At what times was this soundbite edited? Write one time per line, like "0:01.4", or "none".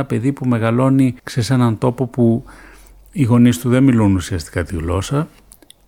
0:01.2